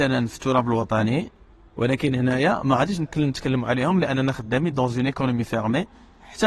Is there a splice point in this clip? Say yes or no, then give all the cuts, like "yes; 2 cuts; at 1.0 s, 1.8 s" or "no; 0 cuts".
no; 0 cuts